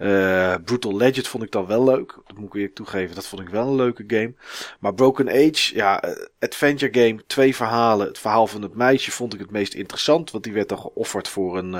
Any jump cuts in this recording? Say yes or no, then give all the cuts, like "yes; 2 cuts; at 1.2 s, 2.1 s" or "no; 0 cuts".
no; 0 cuts